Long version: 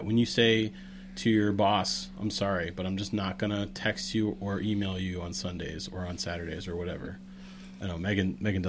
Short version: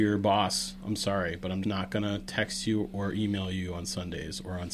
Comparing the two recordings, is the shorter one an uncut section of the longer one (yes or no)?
no